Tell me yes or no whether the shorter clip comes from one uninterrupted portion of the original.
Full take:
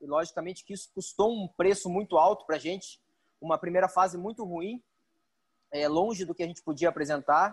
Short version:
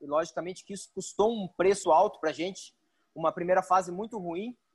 no